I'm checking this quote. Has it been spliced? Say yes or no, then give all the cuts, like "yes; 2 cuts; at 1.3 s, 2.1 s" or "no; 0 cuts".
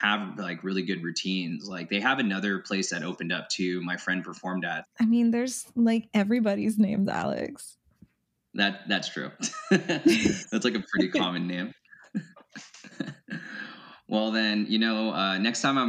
yes; 2 cuts; at 4.8 s, 12.9 s